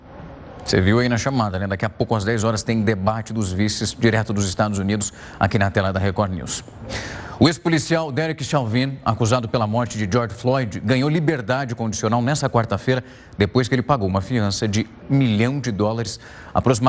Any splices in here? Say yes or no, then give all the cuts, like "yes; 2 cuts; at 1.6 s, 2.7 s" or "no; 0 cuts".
yes; 1 cut; at 15.0 s